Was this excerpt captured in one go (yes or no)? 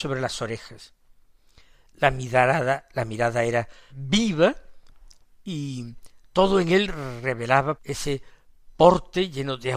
no